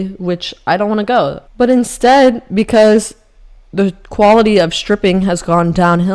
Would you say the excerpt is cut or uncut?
cut